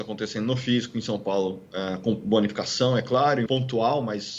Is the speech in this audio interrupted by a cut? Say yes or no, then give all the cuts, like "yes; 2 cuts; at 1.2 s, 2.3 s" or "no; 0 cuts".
yes; 1 cut; at 3.5 s